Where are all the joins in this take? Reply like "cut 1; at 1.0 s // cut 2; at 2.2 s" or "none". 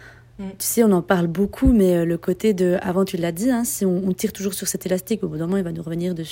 none